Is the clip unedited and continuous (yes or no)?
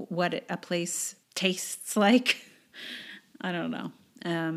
no